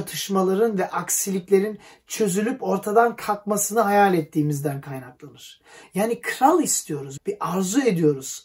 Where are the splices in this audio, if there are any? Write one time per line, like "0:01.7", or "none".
0:05.8
0:07.2